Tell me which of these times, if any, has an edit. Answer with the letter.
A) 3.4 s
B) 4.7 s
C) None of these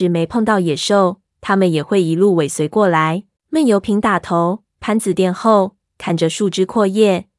A